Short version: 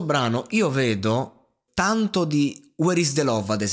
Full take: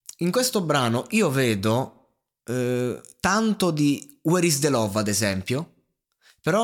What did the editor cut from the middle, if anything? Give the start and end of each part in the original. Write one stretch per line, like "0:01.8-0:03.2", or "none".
0:02.3-0:03.1